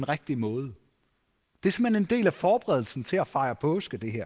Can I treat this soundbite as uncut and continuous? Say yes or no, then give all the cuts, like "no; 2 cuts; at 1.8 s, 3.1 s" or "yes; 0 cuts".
yes; 0 cuts